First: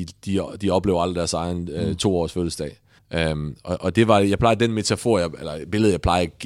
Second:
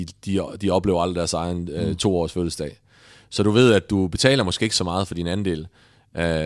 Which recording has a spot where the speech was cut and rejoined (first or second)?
first